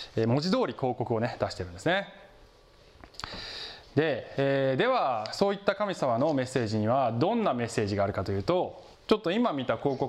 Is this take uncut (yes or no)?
no